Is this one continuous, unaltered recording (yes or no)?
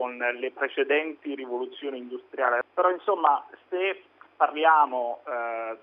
no